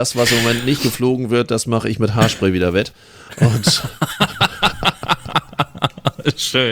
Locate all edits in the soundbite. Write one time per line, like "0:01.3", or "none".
none